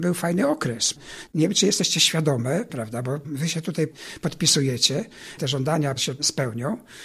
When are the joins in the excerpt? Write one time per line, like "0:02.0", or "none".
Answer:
0:01.3
0:02.7
0:05.4